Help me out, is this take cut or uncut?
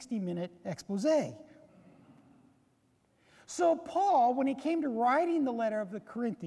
uncut